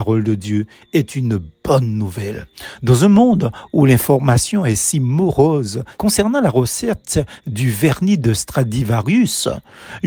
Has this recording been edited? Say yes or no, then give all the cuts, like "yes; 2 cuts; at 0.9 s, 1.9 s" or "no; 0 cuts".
yes; 1 cut; at 6.0 s